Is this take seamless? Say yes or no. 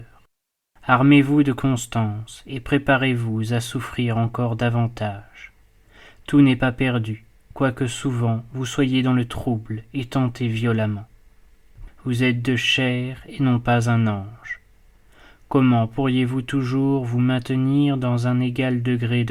no